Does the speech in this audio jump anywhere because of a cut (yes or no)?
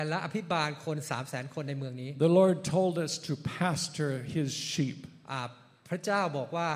no